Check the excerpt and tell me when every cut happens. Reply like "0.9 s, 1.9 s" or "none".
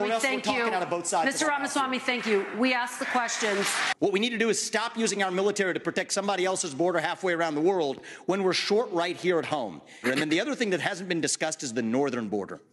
10.0 s